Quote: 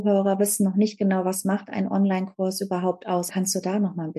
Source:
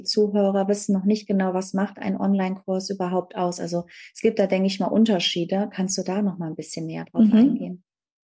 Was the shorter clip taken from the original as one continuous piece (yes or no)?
no